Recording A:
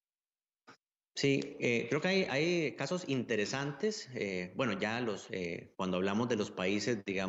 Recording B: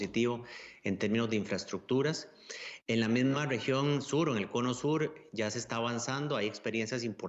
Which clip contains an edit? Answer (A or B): A